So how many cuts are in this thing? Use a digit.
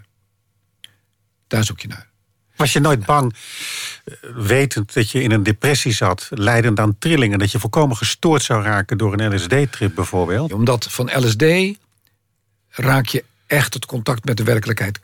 1